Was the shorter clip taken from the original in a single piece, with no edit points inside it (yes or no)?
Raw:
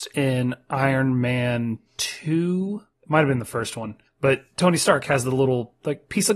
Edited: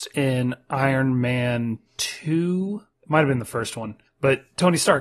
yes